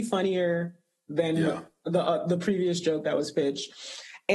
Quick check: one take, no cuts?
yes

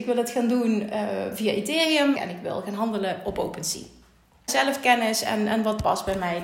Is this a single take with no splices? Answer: no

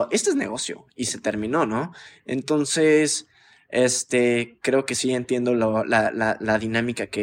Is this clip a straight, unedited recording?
yes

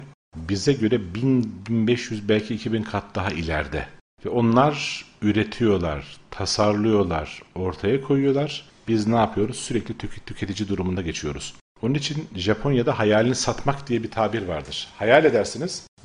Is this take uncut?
yes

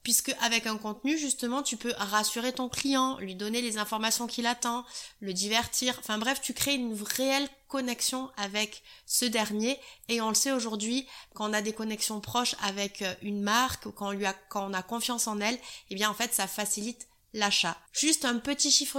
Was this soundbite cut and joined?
yes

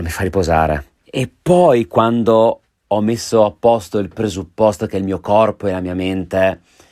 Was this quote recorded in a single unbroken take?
no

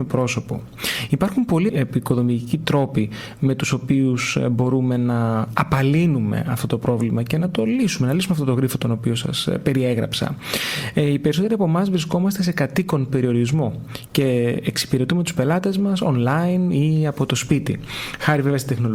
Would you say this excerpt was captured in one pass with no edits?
no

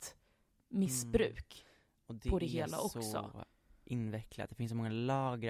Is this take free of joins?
yes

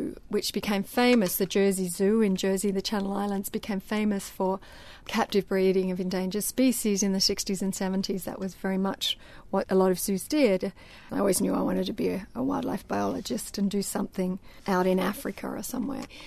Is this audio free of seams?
no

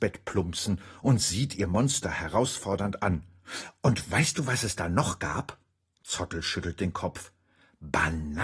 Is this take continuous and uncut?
yes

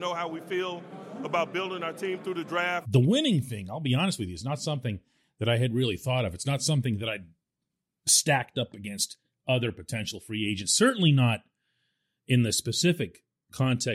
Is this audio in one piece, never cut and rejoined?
no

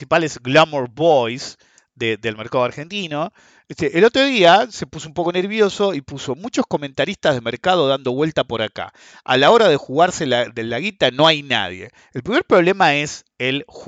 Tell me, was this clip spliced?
no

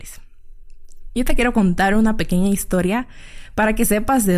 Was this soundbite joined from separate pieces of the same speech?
no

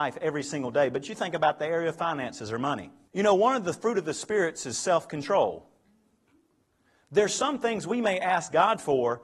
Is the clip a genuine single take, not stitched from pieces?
no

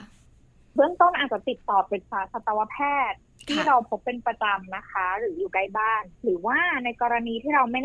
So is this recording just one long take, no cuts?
no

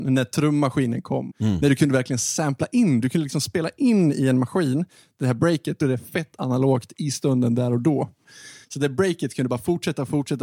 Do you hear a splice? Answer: yes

